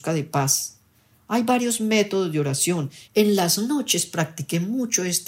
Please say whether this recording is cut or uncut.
cut